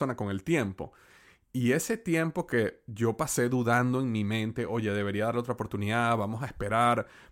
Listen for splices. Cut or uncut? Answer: uncut